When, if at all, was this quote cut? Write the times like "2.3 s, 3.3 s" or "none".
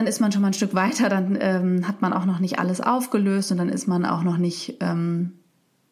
none